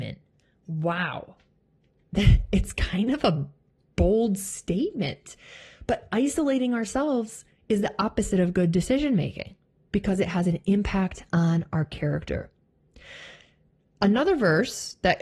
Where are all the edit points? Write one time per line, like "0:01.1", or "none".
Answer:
none